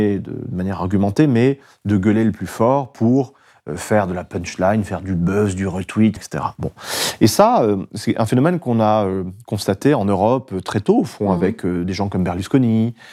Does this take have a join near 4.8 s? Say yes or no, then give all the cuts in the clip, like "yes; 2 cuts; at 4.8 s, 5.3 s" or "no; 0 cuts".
no; 1 cut; at 6.2 s